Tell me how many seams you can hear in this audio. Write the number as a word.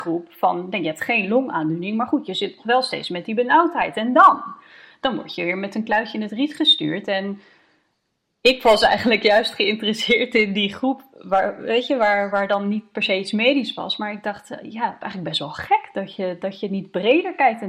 zero